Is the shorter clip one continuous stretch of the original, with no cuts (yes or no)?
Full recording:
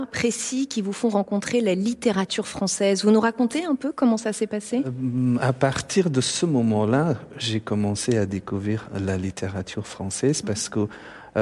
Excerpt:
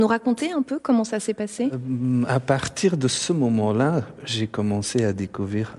yes